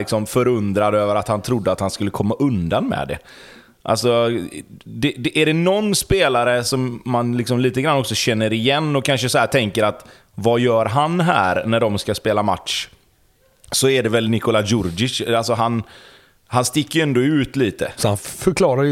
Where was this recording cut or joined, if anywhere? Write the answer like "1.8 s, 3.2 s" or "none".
18.0 s